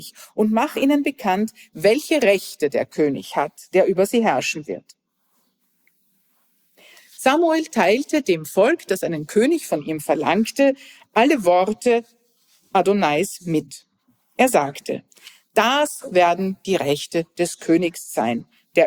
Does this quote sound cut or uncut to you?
uncut